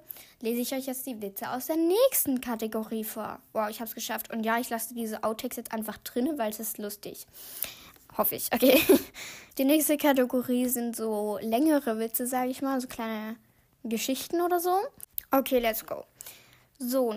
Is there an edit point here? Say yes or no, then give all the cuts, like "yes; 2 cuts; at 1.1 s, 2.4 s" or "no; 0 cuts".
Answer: yes; 1 cut; at 9.5 s